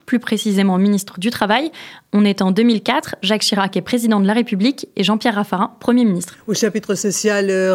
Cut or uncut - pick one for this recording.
uncut